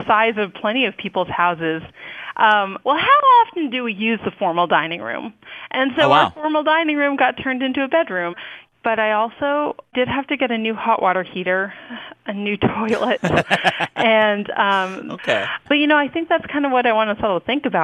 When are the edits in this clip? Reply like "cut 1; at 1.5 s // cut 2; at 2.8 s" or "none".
cut 1; at 2.8 s // cut 2; at 15.6 s